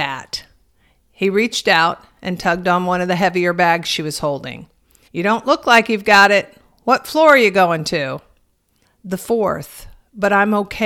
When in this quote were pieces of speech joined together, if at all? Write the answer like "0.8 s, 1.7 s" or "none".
5.1 s, 8.8 s